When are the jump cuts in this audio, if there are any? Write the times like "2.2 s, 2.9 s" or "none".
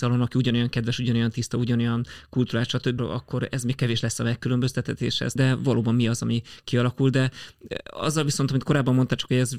3.0 s, 5.4 s